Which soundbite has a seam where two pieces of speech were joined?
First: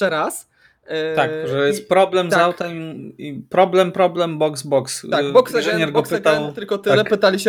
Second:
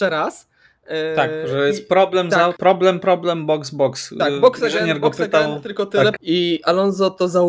second; 2 cuts; at 2.6 s, 6.2 s

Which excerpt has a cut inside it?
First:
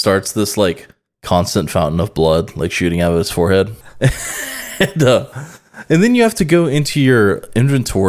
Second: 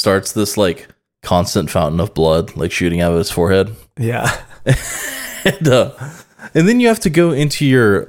first; 1 cut; at 3.8 s

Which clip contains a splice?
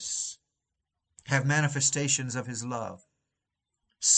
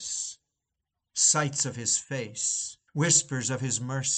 second; 2 cuts; at 1.1 s, 2.9 s

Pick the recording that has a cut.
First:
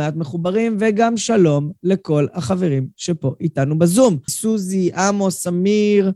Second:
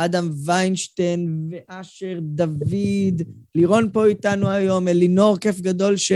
first; 1 cut; at 4.3 s

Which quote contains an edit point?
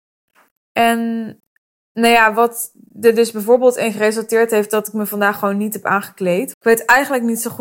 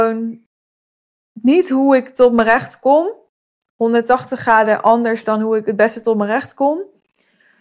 first; 1 cut; at 6.5 s

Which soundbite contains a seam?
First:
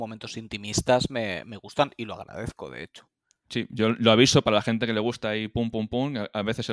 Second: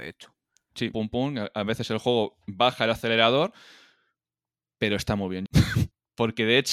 second; 2 cuts; at 0.9 s, 5.5 s

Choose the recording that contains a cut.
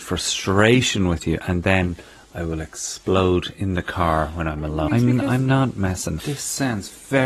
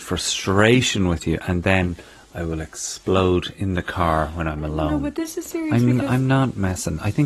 first; 2 cuts; at 4.9 s, 6.2 s

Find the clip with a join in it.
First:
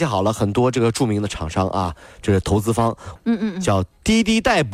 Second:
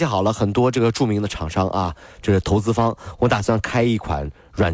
first; 1 cut; at 3.2 s

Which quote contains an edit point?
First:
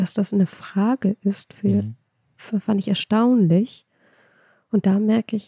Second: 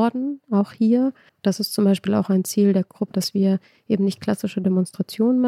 second; 2 cuts; at 1.3 s, 3.1 s

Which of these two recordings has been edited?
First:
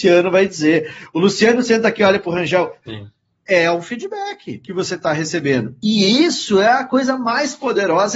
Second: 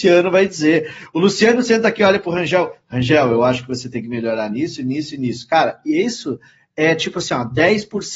first; 1 cut; at 2.8 s

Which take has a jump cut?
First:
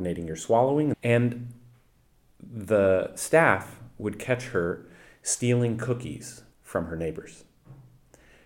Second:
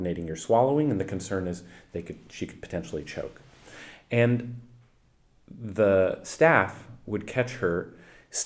first; 2 cuts; at 0.9 s, 6.5 s

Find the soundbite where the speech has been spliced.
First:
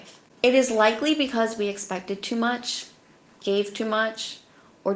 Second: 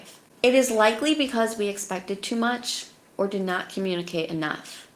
second; 1 cut; at 3.1 s

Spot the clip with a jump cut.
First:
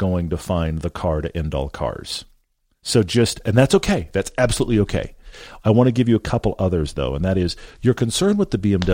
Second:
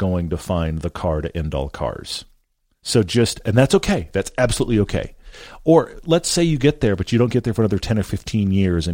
first; 1 cut; at 5.6 s

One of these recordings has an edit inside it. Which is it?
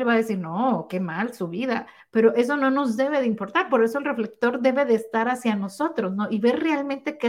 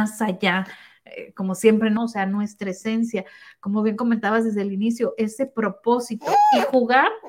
second; 1 cut; at 2.0 s

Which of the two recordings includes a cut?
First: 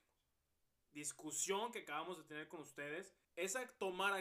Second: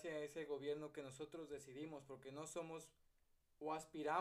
first; 1 cut; at 3.2 s

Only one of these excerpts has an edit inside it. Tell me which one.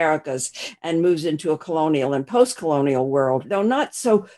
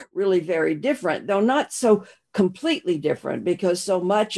first; 1 cut; at 3.4 s

